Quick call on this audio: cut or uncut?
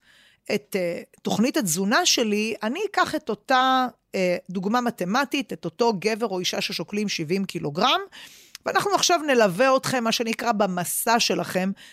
uncut